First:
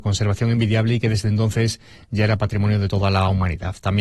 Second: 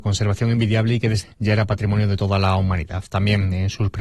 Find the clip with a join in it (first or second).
second